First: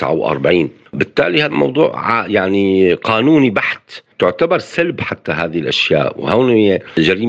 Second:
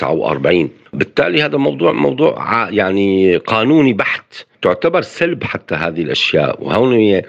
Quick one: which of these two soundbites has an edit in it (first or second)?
first